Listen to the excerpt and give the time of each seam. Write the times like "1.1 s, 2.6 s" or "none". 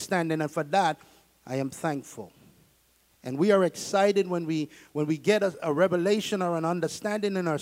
none